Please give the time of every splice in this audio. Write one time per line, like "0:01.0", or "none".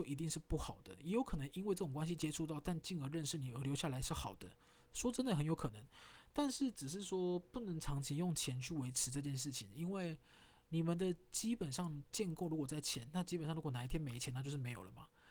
none